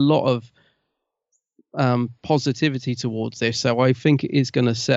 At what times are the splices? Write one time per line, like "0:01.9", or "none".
none